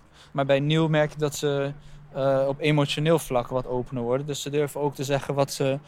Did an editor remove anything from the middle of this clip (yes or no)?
no